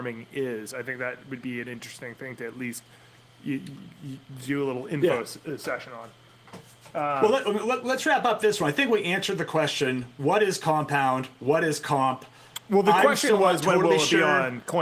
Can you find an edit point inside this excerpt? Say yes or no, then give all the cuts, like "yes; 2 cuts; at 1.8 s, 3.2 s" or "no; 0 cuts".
no; 0 cuts